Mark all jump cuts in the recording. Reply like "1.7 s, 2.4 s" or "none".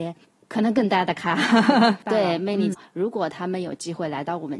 2.7 s